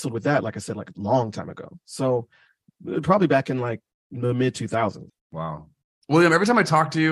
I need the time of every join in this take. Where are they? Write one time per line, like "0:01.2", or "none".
0:05.1